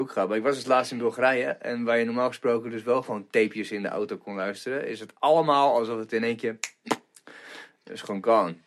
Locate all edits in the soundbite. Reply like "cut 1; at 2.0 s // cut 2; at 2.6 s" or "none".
none